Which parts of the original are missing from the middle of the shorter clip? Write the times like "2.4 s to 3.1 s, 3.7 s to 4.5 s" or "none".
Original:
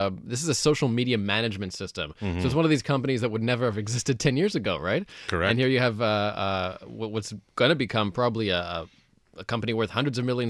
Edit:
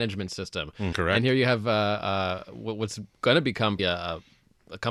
2.3 s to 5.3 s, 8.1 s to 8.4 s